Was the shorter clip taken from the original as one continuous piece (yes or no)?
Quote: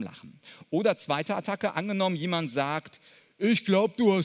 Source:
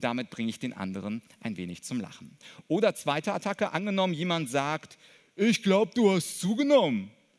yes